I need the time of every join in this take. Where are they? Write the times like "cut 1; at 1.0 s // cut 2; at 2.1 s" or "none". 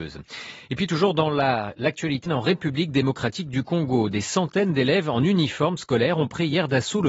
cut 1; at 2.3 s